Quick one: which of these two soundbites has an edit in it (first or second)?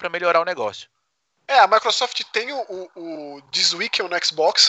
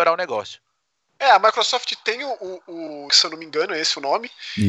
second